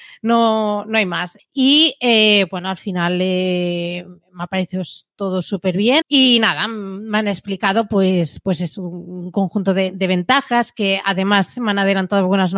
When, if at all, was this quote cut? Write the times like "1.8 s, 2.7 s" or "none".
1.4 s, 6.0 s